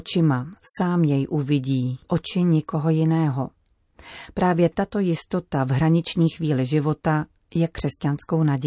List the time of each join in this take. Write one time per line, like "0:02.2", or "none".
0:02.0

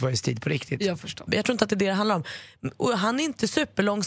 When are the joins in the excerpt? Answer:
0:01.3

